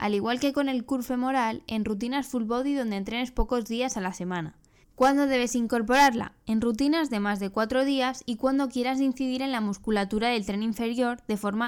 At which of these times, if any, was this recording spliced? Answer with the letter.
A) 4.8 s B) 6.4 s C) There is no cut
A